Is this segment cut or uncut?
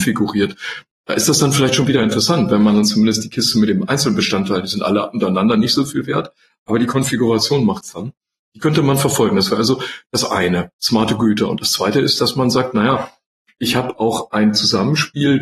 uncut